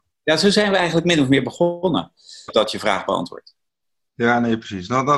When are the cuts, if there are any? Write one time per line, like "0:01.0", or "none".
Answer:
0:02.5